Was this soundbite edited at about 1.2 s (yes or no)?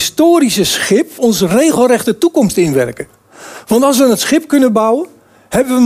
yes